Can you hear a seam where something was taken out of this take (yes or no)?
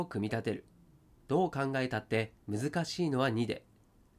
yes